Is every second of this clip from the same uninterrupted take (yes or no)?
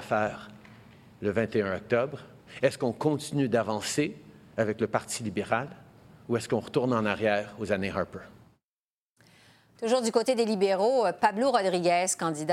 yes